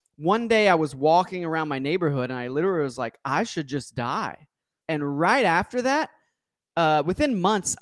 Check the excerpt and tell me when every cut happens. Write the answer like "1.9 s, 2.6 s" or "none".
4.8 s